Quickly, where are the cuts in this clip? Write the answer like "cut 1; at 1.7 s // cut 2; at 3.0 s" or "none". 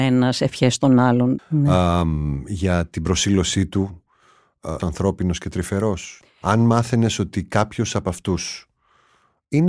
cut 1; at 1.4 s // cut 2; at 4.8 s // cut 3; at 6.2 s